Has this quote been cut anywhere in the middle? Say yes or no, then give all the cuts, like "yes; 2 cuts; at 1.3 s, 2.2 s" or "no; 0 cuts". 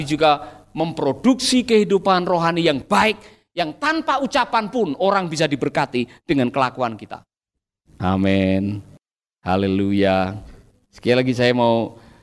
no; 0 cuts